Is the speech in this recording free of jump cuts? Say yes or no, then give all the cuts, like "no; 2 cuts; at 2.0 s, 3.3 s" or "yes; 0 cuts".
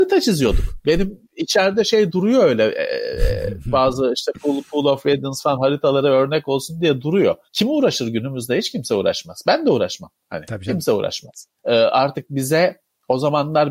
no; 2 cuts; at 7.5 s, 11.6 s